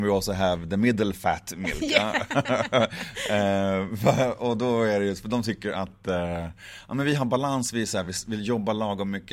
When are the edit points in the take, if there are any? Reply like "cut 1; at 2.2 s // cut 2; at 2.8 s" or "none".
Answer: none